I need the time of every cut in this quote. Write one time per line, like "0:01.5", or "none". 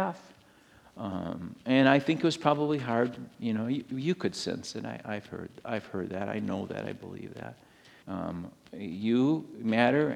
0:08.0

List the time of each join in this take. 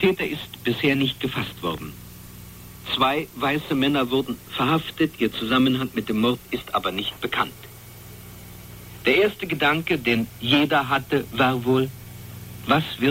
none

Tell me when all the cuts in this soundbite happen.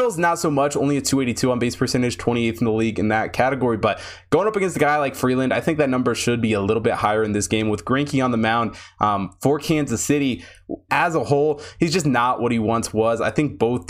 0:10.9

